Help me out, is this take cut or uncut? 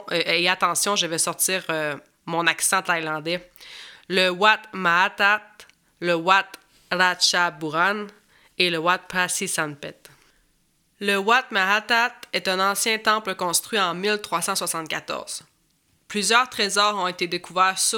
uncut